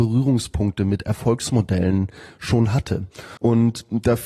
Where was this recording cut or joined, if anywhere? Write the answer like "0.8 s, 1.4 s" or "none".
3.4 s

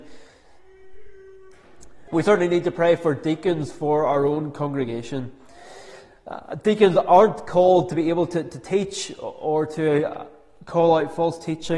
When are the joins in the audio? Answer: 2.1 s

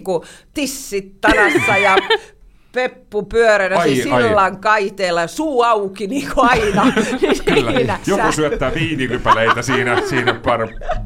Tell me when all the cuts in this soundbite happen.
8.0 s

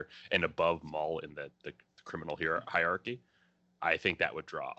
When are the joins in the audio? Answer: none

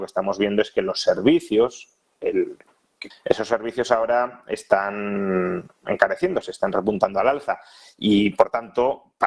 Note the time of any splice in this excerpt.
3.1 s

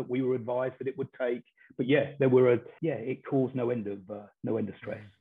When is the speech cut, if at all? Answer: 2.8 s

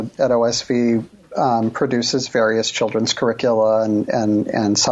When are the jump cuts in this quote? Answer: none

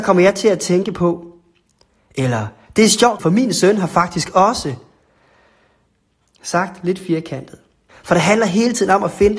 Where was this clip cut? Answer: 3.2 s, 7.9 s

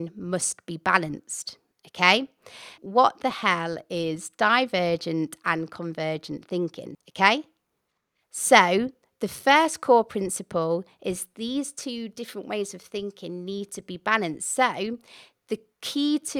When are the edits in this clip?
2.8 s, 6.9 s

